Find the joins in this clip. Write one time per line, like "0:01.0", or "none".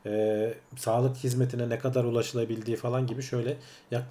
none